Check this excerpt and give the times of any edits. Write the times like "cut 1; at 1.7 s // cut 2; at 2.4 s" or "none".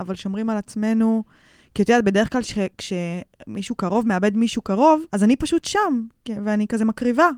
cut 1; at 5.1 s